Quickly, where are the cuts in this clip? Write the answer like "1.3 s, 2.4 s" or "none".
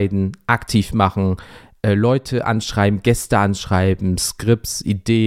none